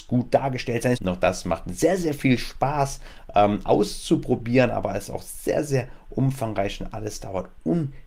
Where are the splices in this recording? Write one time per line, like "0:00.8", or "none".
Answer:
0:00.9